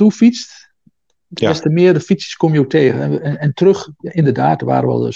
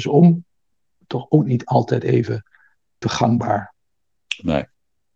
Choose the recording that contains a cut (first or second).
second